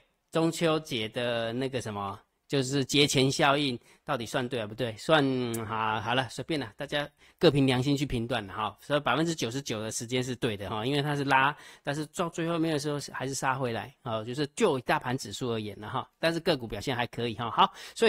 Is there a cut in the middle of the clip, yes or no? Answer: no